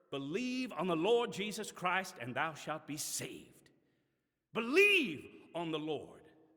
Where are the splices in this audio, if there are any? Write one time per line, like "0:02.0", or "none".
none